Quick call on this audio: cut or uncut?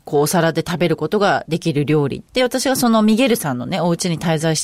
cut